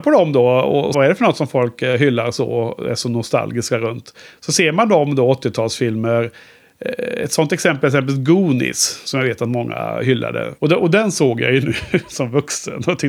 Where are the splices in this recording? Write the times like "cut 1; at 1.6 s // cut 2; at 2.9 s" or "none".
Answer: cut 1; at 0.9 s // cut 2; at 10.6 s

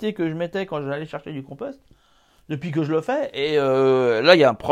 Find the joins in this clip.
none

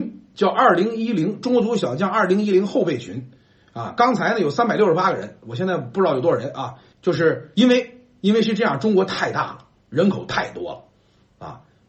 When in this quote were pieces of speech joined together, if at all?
cut 1; at 6.9 s

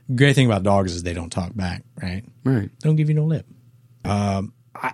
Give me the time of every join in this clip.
cut 1; at 4.0 s

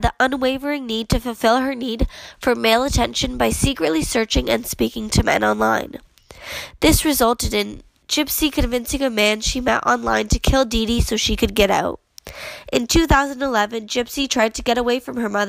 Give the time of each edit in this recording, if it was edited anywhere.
none

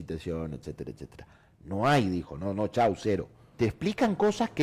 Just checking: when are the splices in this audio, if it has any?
cut 1; at 3.5 s

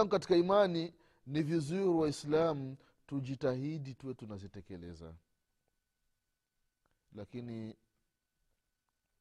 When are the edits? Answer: none

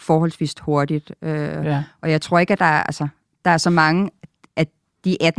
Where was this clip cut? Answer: none

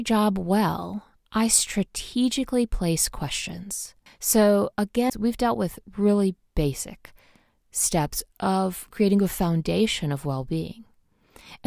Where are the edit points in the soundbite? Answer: cut 1; at 4.1 s // cut 2; at 5.1 s

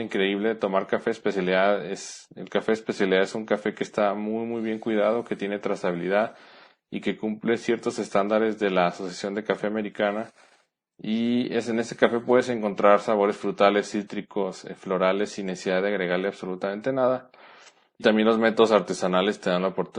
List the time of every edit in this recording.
none

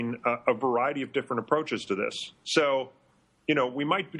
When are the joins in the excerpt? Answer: none

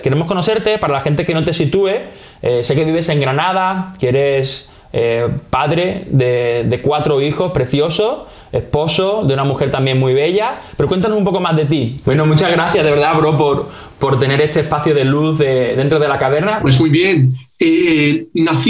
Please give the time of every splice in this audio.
cut 1; at 12.0 s // cut 2; at 16.6 s

